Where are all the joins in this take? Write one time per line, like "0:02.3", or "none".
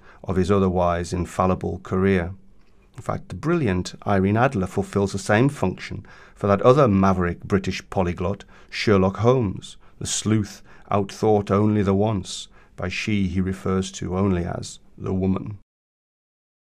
none